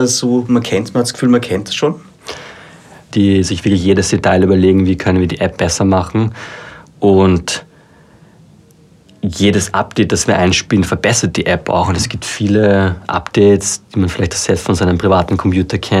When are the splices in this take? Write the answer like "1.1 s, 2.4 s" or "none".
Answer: 3.1 s